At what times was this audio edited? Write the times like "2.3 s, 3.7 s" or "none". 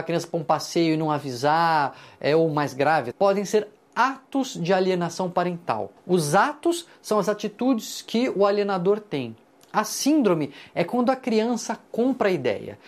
3.1 s, 6.0 s